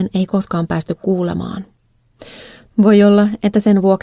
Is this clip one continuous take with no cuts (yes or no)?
no